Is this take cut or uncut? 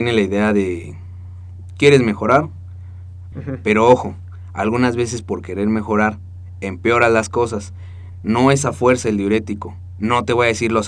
cut